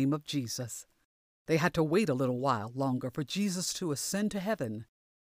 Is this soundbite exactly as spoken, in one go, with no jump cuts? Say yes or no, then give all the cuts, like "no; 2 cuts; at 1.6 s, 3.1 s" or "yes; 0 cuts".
no; 1 cut; at 1.3 s